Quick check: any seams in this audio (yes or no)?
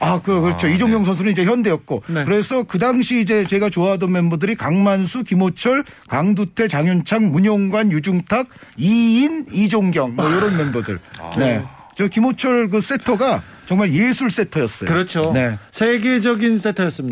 no